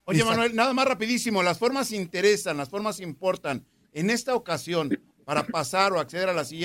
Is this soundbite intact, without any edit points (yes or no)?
yes